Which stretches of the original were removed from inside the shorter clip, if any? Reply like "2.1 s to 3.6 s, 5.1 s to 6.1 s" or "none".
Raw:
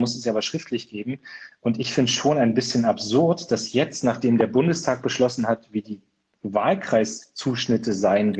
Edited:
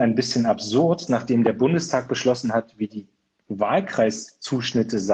3.5 s to 4.0 s